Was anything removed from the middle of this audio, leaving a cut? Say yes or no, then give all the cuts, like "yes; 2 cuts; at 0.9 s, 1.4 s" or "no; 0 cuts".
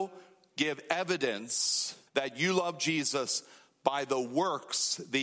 yes; 1 cut; at 2.1 s